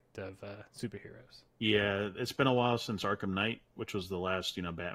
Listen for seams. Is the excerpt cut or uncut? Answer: cut